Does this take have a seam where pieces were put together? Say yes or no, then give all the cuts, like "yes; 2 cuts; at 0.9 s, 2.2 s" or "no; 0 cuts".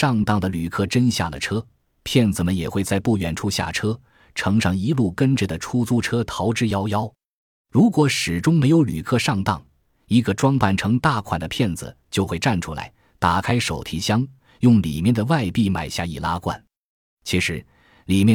no; 0 cuts